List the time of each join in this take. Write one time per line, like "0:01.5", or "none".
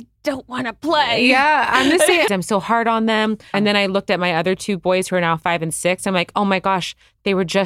0:02.3
0:03.5